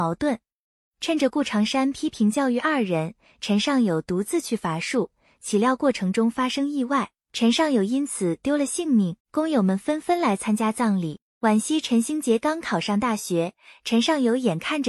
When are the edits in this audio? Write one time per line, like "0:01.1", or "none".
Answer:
0:09.2

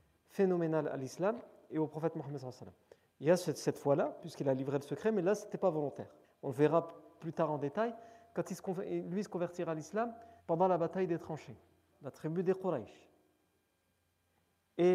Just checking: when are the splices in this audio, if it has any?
0:06.2
0:10.4
0:11.9

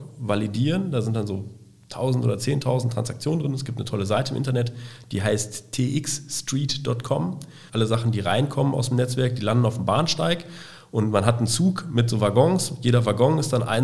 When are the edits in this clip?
0:07.7

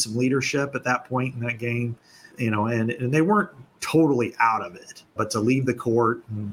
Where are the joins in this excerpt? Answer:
0:02.3
0:05.2

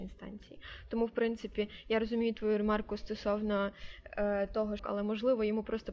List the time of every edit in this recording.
0:04.8

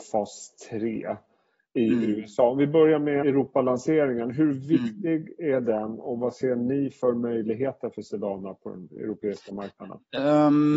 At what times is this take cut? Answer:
0:03.2

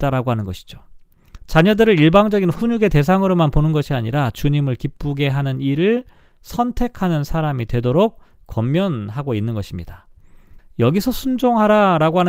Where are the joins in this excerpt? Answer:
0:01.5
0:10.6

